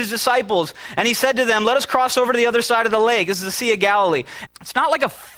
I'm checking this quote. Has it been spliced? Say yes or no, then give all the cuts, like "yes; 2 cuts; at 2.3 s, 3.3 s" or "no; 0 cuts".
yes; 1 cut; at 4.5 s